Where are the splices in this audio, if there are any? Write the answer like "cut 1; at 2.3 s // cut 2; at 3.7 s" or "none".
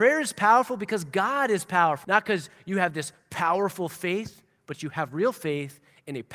cut 1; at 2.0 s